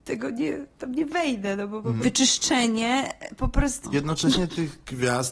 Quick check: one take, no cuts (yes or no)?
no